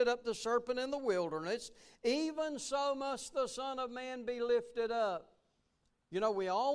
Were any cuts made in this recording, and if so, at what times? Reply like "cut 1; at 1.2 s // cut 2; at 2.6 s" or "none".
none